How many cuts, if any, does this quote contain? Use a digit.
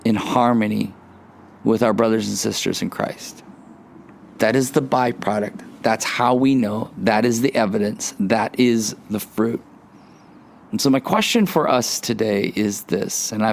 0